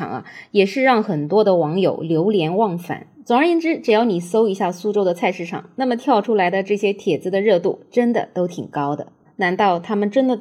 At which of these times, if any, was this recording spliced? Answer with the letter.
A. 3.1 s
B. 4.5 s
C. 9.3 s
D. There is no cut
C